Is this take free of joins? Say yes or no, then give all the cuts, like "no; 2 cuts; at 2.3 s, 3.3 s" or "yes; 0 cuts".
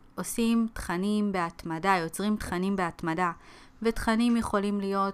yes; 0 cuts